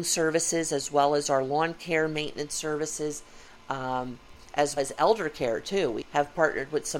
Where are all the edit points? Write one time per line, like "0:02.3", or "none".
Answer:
0:04.8
0:06.0